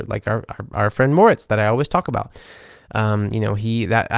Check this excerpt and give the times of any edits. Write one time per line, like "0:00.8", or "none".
none